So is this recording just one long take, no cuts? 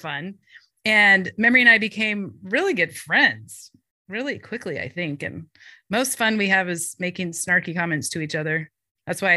yes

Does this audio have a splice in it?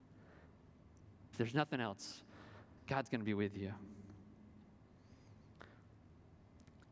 yes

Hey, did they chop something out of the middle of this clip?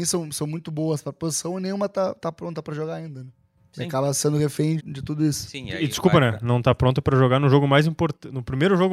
yes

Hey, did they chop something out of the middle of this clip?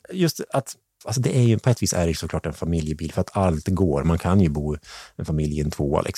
no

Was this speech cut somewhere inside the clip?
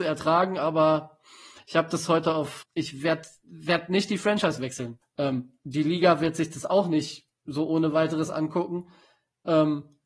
yes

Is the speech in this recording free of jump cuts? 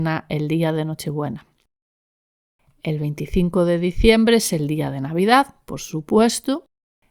yes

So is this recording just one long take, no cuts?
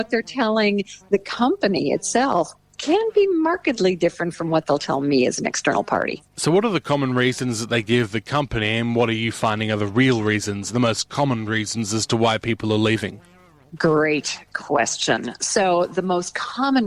yes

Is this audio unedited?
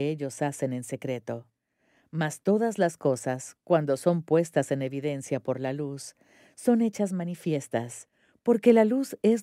yes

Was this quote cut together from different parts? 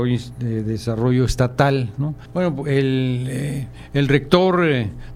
yes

